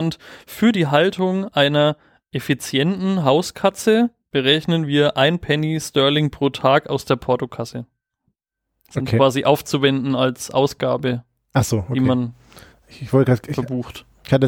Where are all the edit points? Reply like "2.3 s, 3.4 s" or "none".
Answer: none